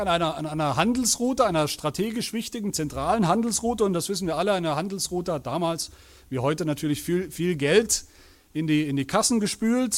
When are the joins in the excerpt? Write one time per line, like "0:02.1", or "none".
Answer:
none